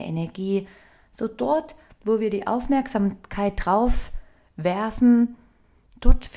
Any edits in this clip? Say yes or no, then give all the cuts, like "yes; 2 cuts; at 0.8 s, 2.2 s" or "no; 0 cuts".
no; 0 cuts